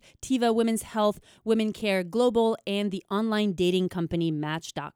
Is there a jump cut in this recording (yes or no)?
no